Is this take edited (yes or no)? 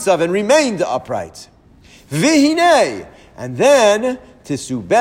no